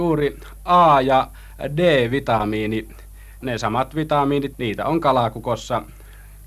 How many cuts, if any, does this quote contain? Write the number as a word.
two